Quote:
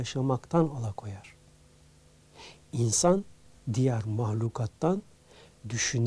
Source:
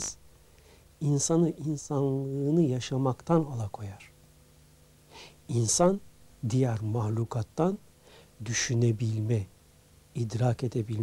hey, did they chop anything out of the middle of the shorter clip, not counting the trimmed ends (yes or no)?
no